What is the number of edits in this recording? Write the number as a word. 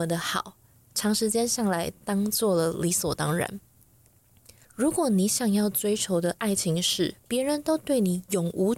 one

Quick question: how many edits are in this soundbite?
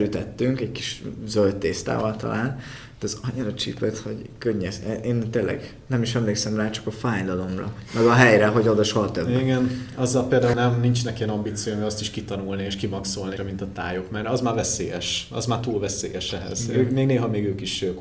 two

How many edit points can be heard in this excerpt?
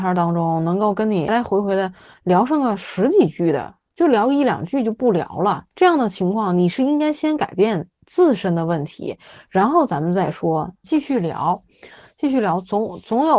three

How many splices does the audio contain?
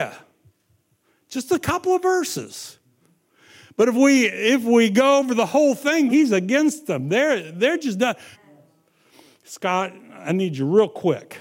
two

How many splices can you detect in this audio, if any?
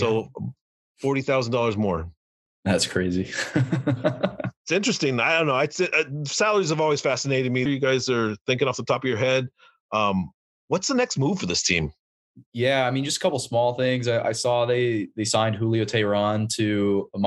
two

